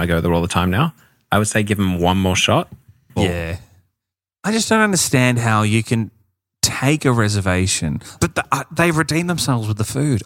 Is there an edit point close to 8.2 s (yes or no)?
yes